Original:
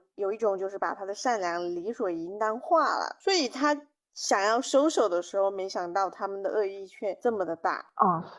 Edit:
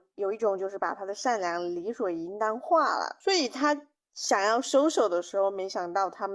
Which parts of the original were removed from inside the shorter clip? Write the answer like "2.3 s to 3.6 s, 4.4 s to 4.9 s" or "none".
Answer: none